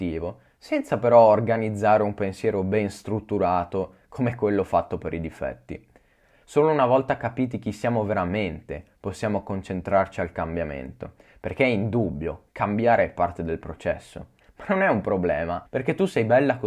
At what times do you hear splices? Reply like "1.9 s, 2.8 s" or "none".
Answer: 6.4 s, 14.4 s, 15.7 s